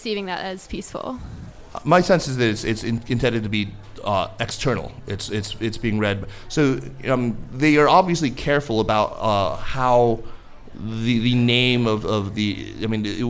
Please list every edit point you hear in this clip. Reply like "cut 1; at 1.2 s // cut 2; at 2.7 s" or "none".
none